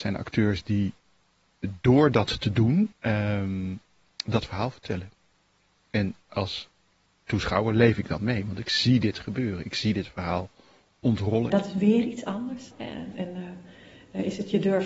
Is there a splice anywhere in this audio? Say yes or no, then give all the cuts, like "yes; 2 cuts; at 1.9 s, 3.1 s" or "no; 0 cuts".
yes; 3 cuts; at 2.9 s, 11.5 s, 12.7 s